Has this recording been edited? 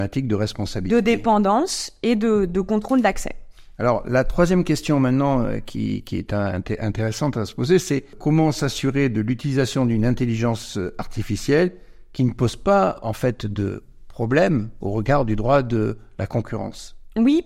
no; 0 cuts

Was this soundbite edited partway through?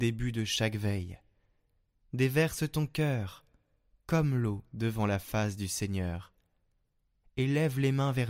no; 0 cuts

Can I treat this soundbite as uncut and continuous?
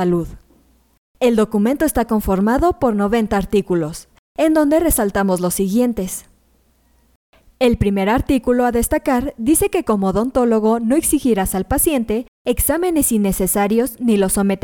yes; 0 cuts

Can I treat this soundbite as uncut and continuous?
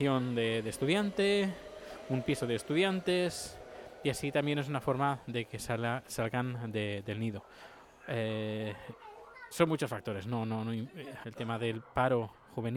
no; 2 cuts; at 9.5 s, 11.2 s

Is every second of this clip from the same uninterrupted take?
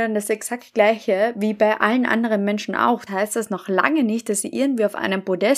no; 1 cut; at 3.1 s

